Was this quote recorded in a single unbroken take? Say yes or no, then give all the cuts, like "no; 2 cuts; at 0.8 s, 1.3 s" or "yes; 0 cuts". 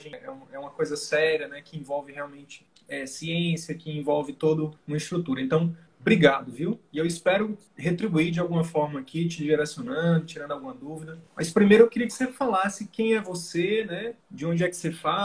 yes; 0 cuts